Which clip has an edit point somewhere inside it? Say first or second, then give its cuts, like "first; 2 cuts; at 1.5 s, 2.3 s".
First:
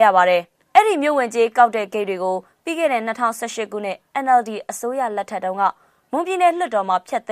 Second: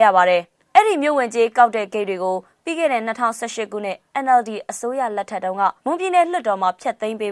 second; 1 cut; at 5.8 s